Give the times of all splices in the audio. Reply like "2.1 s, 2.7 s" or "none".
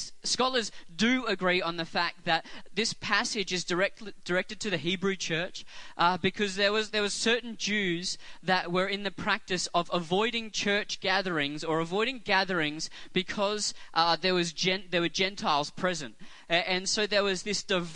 2.7 s